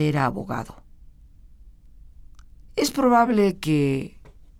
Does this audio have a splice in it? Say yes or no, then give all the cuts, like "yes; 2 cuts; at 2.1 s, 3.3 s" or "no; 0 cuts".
yes; 1 cut; at 2.7 s